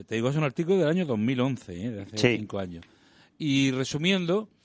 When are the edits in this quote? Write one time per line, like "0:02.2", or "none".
none